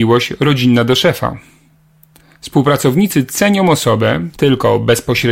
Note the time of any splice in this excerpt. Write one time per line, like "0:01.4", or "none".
0:04.4